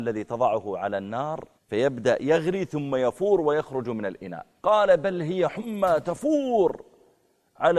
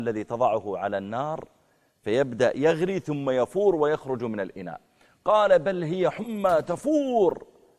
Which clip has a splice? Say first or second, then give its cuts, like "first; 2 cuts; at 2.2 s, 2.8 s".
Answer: first; 2 cuts; at 1.6 s, 4.6 s